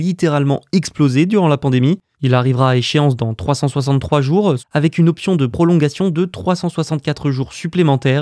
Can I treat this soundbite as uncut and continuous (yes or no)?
no